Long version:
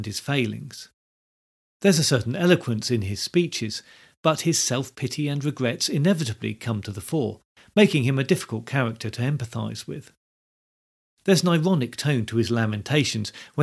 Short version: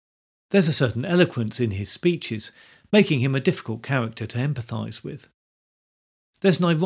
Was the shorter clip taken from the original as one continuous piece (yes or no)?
no